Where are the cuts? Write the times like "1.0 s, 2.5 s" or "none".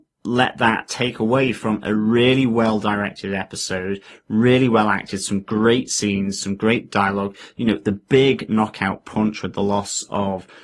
none